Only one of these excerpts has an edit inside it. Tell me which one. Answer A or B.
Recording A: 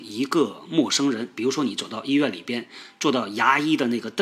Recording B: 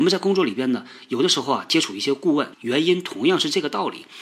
B